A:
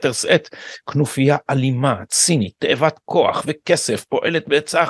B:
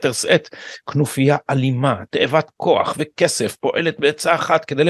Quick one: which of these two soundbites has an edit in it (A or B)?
B